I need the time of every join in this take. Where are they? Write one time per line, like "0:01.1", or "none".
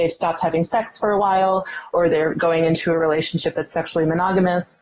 none